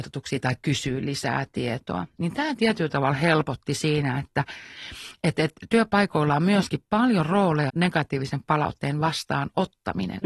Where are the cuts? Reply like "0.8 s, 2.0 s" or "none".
7.7 s

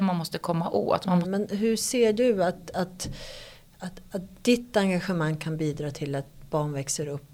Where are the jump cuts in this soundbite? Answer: 1.2 s

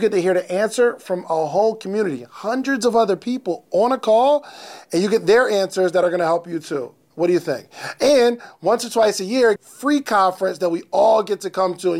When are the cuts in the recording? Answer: 9.6 s

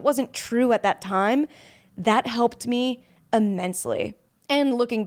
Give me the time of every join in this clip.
none

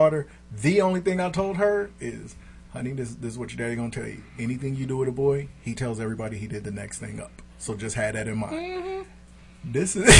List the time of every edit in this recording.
7.5 s

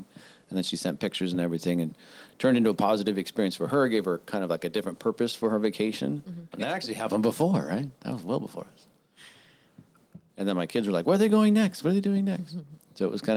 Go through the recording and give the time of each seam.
6.5 s, 10.3 s

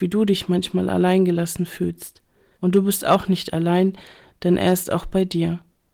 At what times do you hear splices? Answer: 2.5 s

